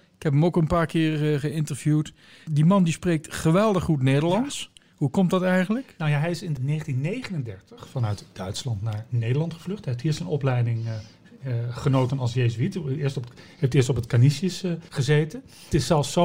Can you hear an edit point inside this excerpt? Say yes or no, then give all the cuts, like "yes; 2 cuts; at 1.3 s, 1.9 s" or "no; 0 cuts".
no; 0 cuts